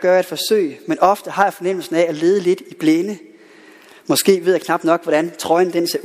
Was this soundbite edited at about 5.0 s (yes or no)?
no